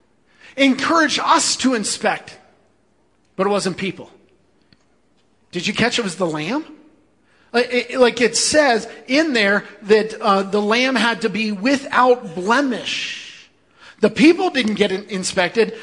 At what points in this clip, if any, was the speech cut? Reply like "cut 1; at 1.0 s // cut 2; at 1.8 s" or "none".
none